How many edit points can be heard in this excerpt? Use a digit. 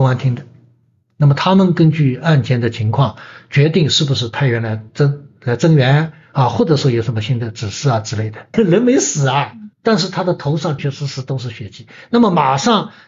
3